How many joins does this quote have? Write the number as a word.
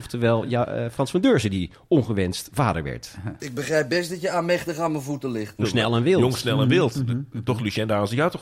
one